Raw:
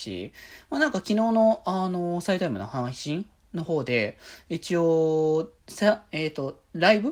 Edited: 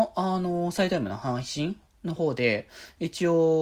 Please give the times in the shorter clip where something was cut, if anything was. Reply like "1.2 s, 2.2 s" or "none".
none

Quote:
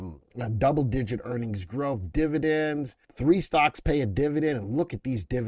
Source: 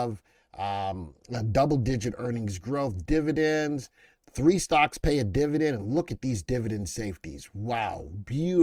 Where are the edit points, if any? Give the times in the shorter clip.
3.0 s

